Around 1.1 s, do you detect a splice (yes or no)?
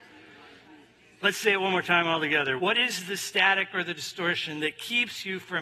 no